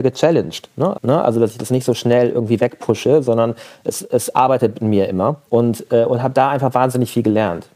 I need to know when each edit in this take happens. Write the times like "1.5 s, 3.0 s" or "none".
0.9 s, 5.5 s